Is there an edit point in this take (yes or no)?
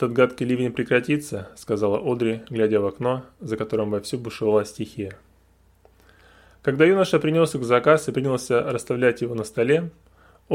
no